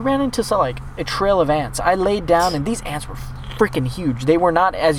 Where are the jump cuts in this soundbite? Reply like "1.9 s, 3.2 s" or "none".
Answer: none